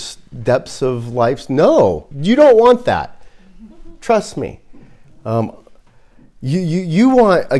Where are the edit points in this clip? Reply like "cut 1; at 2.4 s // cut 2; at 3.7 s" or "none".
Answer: cut 1; at 2.1 s

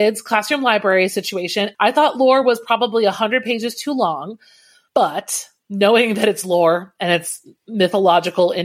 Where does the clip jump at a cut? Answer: cut 1; at 1.7 s

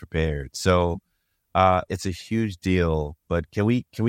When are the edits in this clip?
cut 1; at 1.9 s

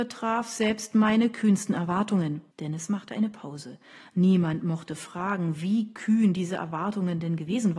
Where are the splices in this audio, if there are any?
cut 1; at 2.5 s

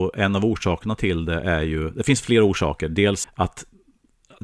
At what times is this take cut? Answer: cut 1; at 3.2 s

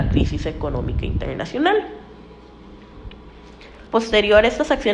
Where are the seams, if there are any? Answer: cut 1; at 3.9 s

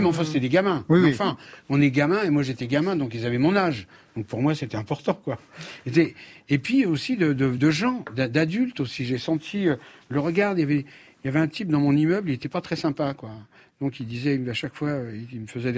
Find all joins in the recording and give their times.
none

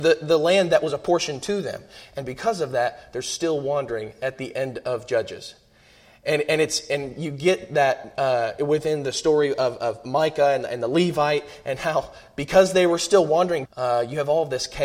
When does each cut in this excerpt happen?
cut 1; at 13.7 s

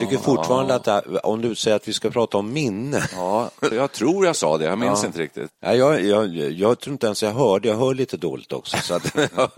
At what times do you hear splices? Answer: cut 1; at 3.7 s // cut 2; at 5.5 s

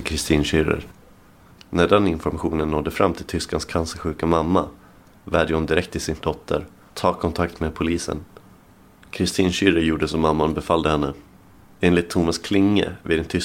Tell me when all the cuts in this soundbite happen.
none

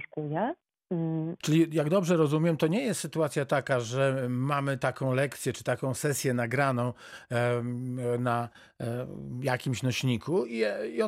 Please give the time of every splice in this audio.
cut 1; at 1.4 s

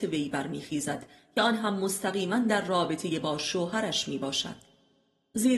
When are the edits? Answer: none

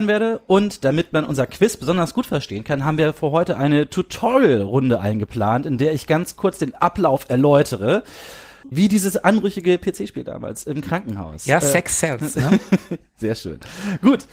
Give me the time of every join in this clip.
cut 1; at 8.6 s

